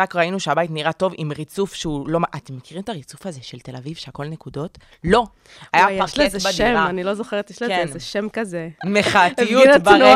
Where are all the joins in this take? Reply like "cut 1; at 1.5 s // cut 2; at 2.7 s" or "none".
cut 1; at 8.8 s